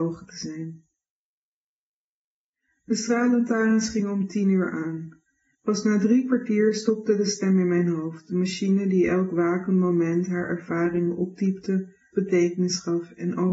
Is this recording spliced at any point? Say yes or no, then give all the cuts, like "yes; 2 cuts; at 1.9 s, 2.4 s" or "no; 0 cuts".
yes; 2 cuts; at 5.5 s, 12.1 s